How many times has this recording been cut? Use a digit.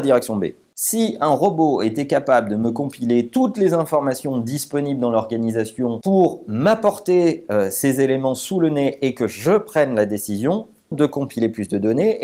1